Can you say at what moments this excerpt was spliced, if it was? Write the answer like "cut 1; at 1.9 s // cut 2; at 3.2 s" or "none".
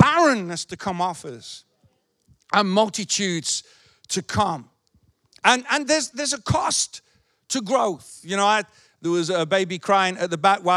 cut 1; at 6.1 s

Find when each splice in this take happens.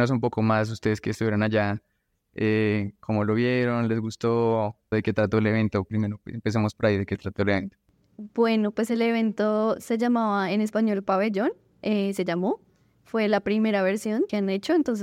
cut 1; at 4.9 s

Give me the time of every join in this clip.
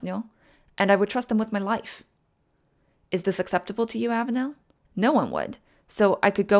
cut 1; at 4.9 s

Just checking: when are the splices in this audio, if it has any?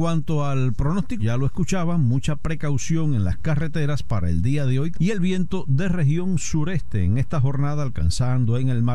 cut 1; at 1.2 s // cut 2; at 4.9 s

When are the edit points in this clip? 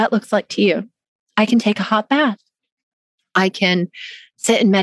none

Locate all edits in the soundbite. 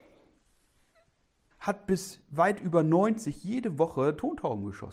cut 1; at 1.5 s

